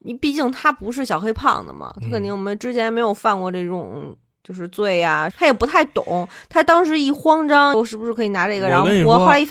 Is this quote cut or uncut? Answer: cut